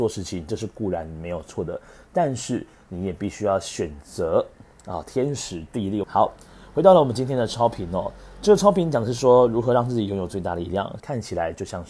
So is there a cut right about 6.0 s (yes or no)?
yes